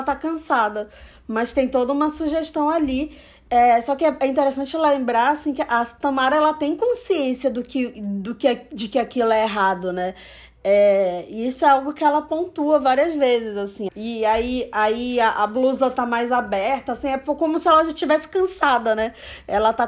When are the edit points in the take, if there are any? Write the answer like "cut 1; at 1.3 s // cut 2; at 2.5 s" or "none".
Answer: cut 1; at 13.9 s